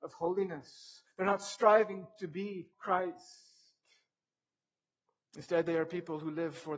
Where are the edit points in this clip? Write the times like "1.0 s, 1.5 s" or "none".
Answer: 2.7 s

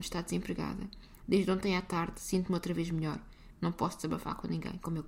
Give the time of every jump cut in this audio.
1.2 s, 3.5 s

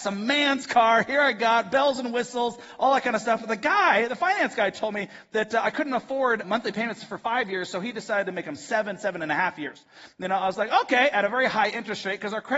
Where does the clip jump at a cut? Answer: 6.4 s

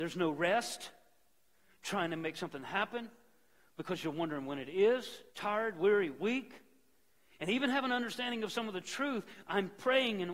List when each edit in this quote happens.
5.3 s

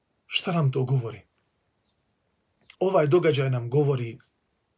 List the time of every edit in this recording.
2.7 s

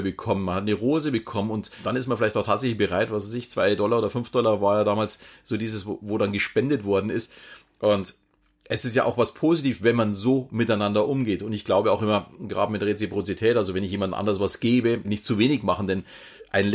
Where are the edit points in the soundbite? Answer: 15.0 s

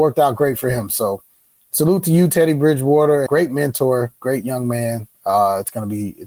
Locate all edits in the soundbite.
3.3 s

